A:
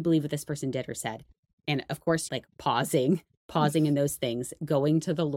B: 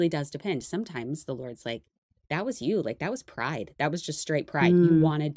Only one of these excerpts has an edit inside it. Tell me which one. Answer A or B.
A